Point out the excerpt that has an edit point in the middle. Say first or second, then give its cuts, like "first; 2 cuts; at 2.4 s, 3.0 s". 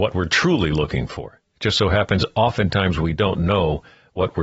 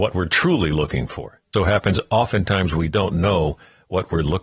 second; 1 cut; at 1.5 s